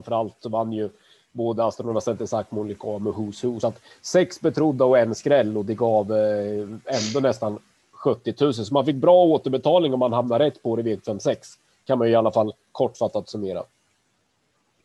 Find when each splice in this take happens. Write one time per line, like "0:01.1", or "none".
none